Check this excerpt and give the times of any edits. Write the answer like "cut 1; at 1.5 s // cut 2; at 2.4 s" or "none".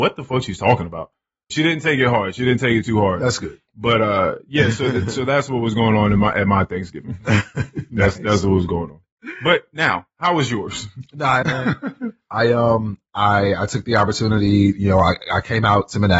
cut 1; at 1.5 s // cut 2; at 11.4 s